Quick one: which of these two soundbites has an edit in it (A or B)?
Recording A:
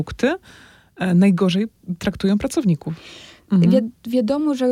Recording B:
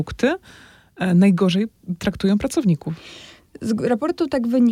A